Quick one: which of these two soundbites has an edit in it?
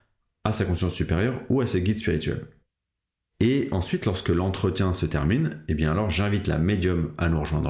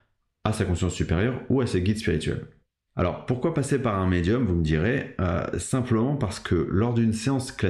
second; 1 cut; at 2.9 s

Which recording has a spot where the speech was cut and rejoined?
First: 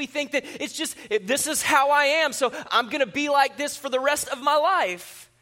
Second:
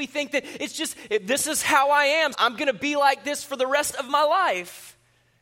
second; 1 cut; at 2.3 s

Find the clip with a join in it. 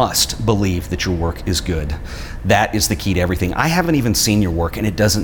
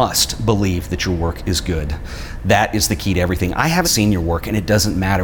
second; 1 cut; at 3.8 s

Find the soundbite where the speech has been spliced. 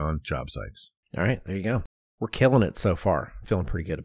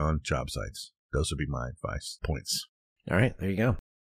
first; 1 cut; at 1.0 s

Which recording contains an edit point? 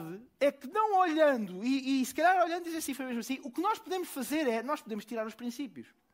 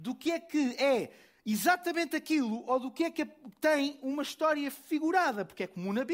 first; 1 cut; at 2.9 s

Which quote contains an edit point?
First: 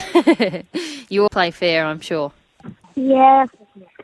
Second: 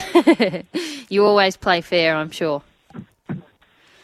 first; 2 cuts; at 1.3 s, 2.8 s

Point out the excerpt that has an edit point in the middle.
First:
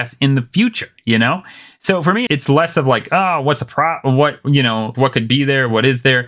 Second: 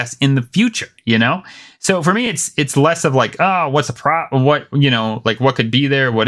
first; 2 cuts; at 2.3 s, 4.9 s

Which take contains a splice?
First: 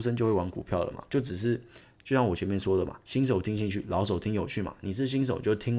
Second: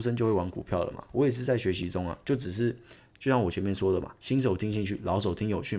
first; 1 cut; at 1.0 s

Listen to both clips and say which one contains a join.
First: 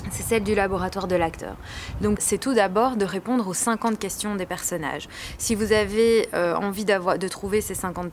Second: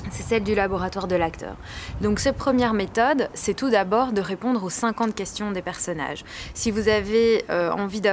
first; 1 cut; at 2.2 s

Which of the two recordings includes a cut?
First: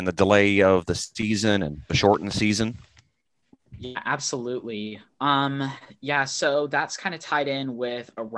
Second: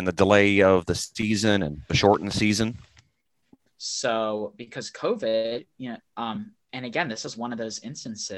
second; 2 cuts; at 3.7 s, 6.0 s

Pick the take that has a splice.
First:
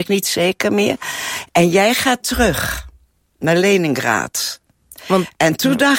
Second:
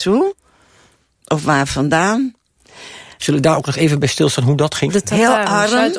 second; 2 cuts; at 3.2 s, 4.9 s

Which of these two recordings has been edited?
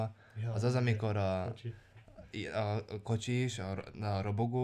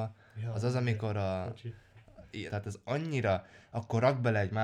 second; 1 cut; at 2.5 s

